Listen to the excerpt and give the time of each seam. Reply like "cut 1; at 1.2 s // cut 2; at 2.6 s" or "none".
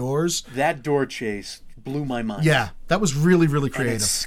none